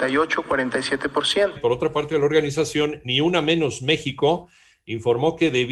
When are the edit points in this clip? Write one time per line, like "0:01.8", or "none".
0:01.6